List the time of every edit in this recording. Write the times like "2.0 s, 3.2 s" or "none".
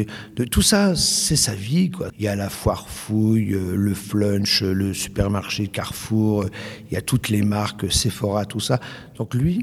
2.1 s